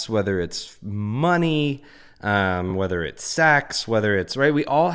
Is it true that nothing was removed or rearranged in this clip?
yes; 0 cuts

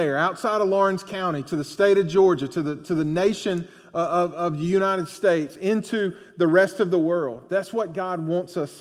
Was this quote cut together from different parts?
no; 0 cuts

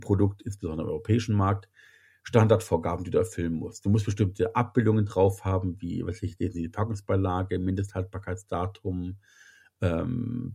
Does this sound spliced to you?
no; 0 cuts

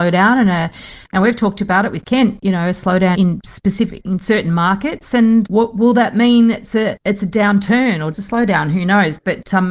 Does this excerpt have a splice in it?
yes; 3 cuts; at 3.1 s, 5.5 s, 8.1 s

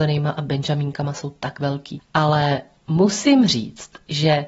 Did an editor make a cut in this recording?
yes; 1 cut; at 2.0 s

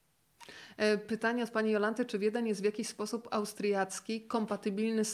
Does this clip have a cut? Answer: no; 0 cuts

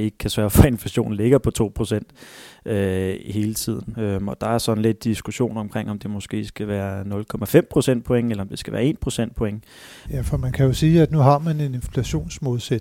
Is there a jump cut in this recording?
yes; 2 cuts; at 3.9 s, 10.1 s

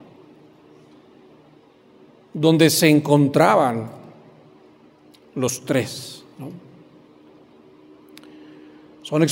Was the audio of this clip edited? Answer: no; 0 cuts

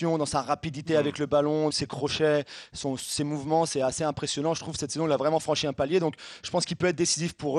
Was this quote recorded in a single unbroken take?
no; 1 cut; at 1.7 s

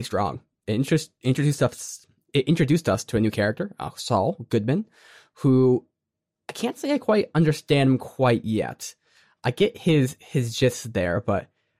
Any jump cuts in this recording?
no; 0 cuts

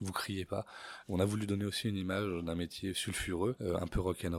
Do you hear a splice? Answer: no; 0 cuts

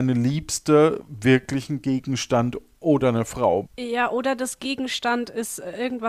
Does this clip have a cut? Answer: yes; 1 cut; at 3.6 s

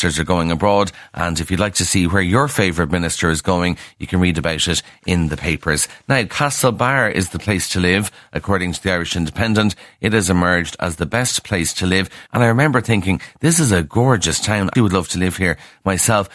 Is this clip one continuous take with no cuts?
no; 2 cuts; at 12.3 s, 14.8 s

